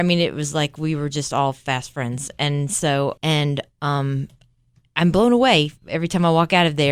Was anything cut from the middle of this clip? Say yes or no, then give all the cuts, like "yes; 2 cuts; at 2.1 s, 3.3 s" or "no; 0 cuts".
yes; 1 cut; at 3.2 s